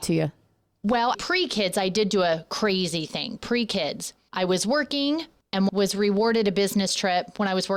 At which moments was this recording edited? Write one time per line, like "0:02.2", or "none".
0:01.1